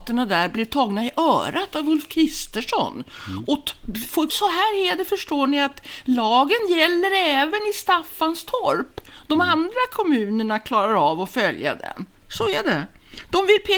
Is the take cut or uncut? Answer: cut